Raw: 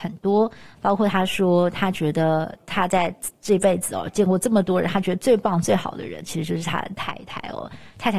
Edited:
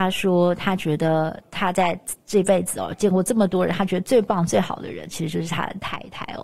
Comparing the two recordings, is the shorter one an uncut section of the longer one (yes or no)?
yes